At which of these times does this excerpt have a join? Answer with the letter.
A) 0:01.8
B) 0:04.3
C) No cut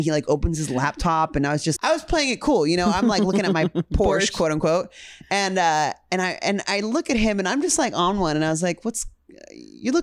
A